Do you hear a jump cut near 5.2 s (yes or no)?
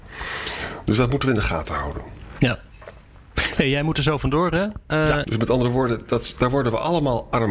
yes